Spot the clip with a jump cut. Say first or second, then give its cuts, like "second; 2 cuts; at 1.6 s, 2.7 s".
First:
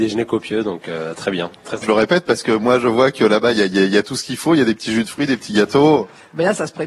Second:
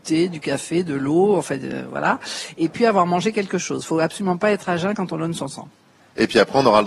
first; 1 cut; at 1.8 s